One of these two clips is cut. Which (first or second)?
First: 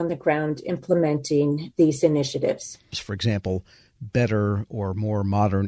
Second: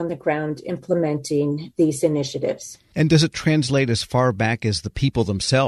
first